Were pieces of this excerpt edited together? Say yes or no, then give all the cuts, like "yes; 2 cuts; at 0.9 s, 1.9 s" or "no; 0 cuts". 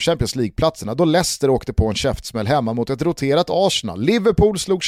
no; 0 cuts